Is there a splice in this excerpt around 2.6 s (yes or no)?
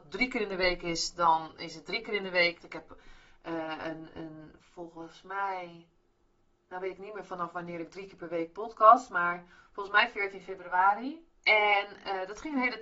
yes